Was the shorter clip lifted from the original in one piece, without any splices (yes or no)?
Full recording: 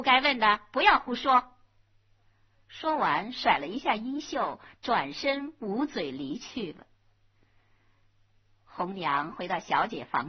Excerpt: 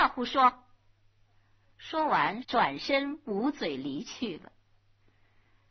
no